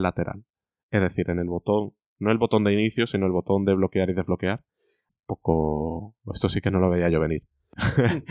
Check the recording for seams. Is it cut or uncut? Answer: cut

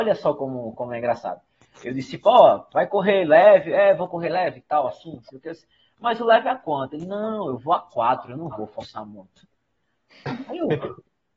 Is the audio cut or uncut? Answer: uncut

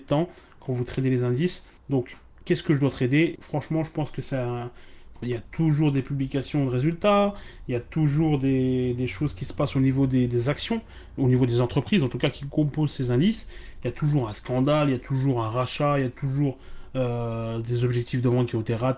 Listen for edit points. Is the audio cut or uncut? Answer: cut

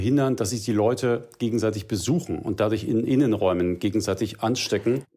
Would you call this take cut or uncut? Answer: uncut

